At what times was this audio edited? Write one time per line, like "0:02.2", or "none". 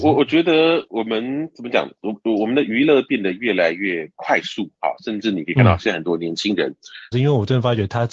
0:07.1